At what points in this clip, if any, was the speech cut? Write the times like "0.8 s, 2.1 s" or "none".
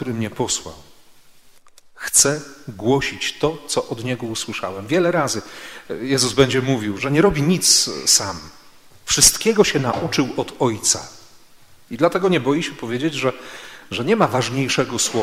7.0 s, 11.9 s